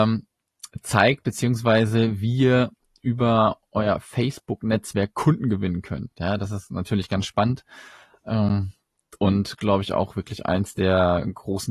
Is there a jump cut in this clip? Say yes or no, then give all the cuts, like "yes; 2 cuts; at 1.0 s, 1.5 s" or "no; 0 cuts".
no; 0 cuts